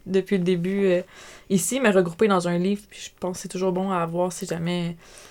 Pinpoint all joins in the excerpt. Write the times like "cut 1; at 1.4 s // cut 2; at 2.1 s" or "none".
none